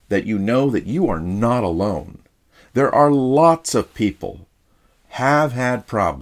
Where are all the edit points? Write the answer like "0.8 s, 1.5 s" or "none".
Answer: 4.9 s

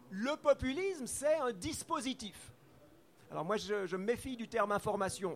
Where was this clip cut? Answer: 3.2 s

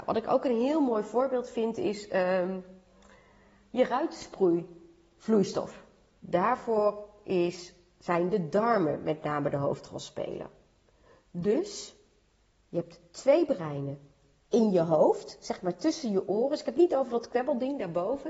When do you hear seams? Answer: 6.2 s

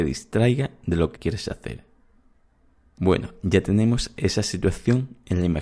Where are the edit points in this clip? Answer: 1.1 s

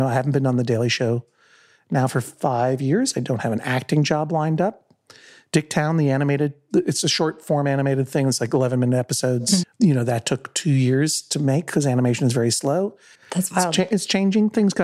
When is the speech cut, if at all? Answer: 9.6 s, 13.1 s

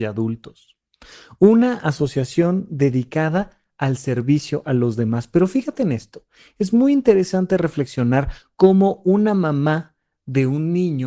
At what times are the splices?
none

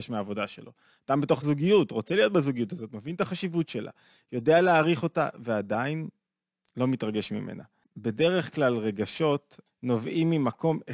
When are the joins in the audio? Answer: 7.8 s, 9.7 s

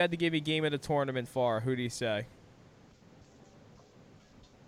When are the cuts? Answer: 1.3 s

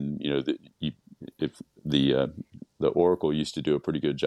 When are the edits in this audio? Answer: none

